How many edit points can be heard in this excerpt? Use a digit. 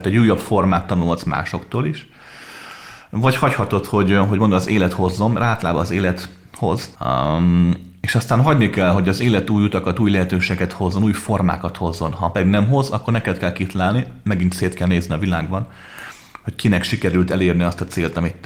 1